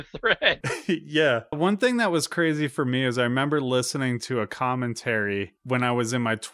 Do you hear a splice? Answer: yes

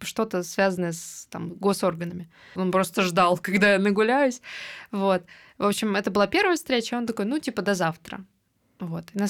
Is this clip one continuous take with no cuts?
no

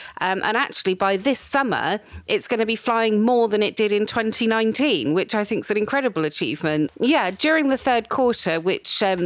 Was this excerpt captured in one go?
no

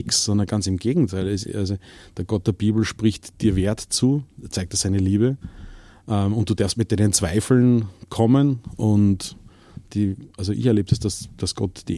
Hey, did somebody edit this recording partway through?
no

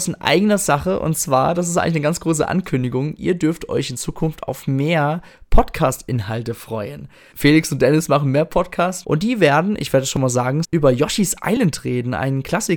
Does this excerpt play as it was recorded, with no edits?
no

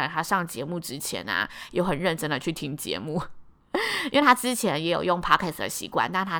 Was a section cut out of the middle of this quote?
no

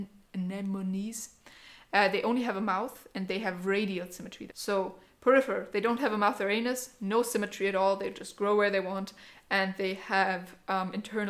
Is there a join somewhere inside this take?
yes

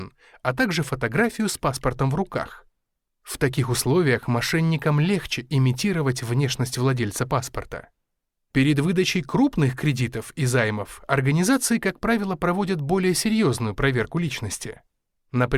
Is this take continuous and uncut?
yes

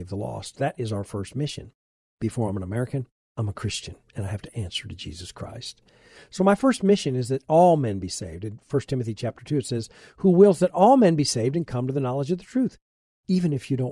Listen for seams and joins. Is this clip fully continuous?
yes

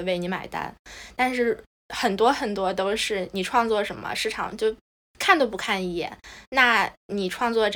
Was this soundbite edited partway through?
no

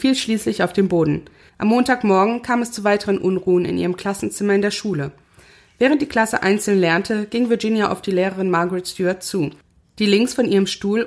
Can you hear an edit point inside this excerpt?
yes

